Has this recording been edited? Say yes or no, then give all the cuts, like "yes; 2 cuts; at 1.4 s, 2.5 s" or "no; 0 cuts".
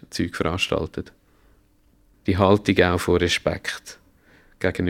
yes; 1 cut; at 2.1 s